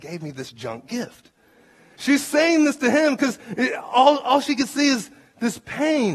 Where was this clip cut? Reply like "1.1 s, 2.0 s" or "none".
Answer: 1.9 s